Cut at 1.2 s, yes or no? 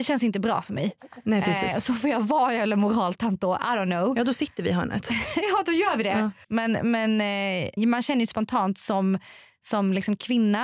no